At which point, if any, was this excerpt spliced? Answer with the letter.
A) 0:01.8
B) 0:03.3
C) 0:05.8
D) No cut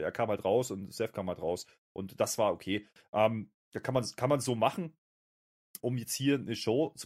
C